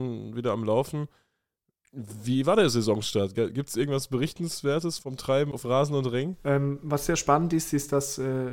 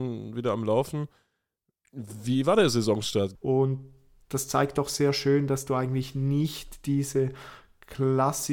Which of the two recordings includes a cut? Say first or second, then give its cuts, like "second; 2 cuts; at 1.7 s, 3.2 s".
second; 1 cut; at 3.3 s